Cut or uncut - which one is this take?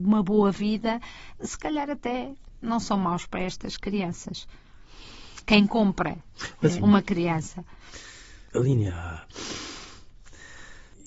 cut